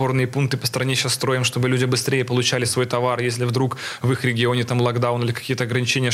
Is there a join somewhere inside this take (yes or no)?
no